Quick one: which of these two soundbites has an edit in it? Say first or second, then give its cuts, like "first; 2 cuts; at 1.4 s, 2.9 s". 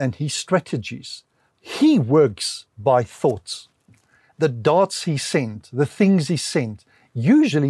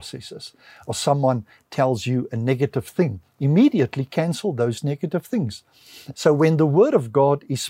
second; 1 cut; at 6.1 s